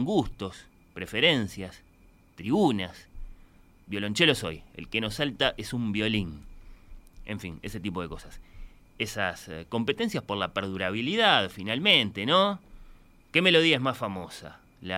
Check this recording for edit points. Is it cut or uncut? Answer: uncut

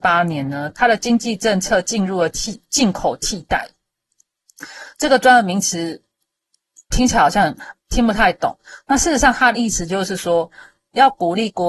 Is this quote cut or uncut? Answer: uncut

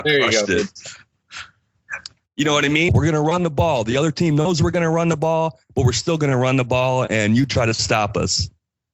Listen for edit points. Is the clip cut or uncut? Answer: cut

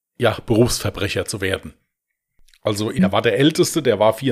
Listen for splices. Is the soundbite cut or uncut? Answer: cut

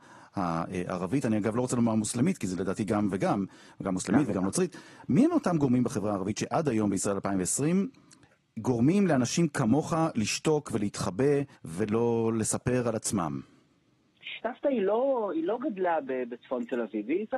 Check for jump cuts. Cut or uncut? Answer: cut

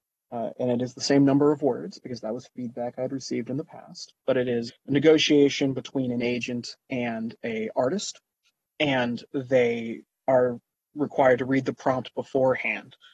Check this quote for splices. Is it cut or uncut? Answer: cut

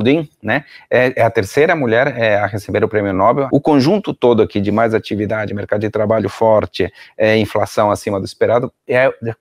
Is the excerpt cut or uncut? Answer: cut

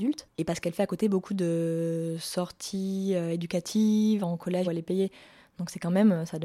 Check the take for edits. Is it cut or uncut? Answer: cut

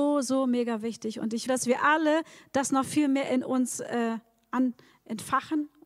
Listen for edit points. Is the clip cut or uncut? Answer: cut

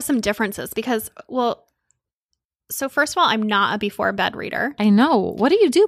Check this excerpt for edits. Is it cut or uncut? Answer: uncut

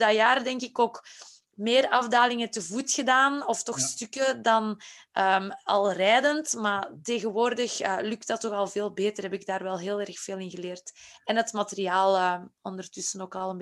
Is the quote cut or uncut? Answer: uncut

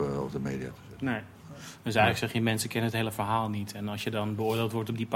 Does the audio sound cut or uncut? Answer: uncut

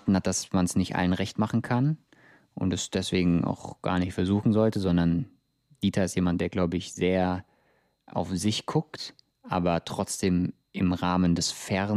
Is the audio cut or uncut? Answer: uncut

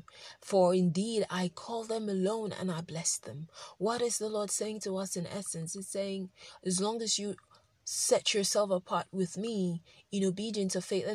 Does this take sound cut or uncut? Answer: uncut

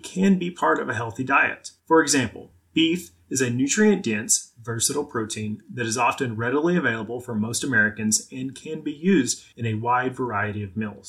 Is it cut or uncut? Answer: cut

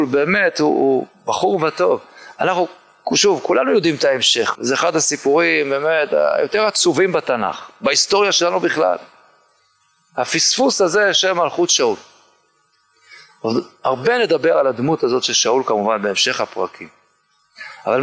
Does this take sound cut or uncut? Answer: cut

